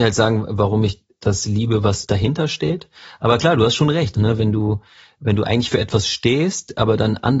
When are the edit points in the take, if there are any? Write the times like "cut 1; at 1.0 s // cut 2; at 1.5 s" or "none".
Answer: cut 1; at 4.1 s